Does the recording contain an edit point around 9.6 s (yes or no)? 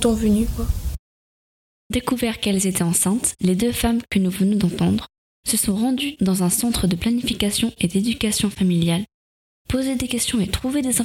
yes